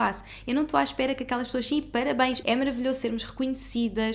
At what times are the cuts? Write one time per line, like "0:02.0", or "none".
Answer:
0:02.4

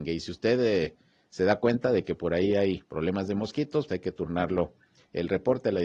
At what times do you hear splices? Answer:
0:03.9

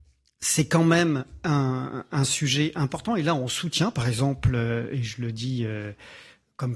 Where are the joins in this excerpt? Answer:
none

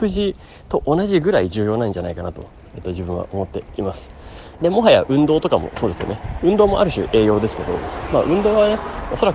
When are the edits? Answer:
0:04.6

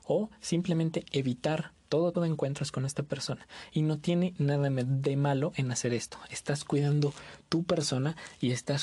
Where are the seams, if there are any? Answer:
0:02.1

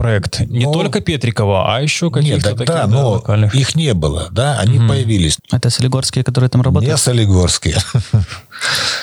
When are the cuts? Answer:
0:05.4

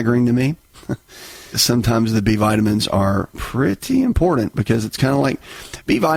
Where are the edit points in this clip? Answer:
0:01.5

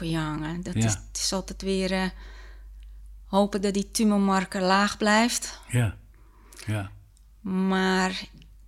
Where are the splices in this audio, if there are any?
none

